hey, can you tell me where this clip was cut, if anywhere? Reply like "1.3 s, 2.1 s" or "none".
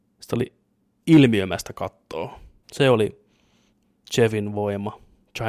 2.6 s